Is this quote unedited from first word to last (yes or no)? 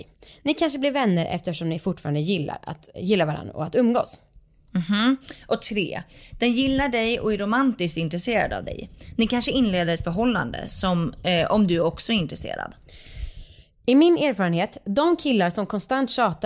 no